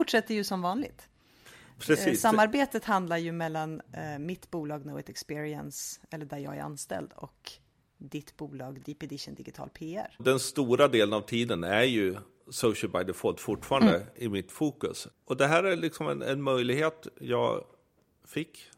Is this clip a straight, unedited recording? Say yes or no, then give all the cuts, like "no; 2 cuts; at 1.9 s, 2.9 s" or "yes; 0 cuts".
yes; 0 cuts